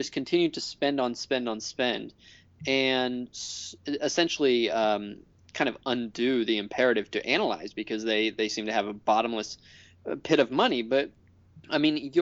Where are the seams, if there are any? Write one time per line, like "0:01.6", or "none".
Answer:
none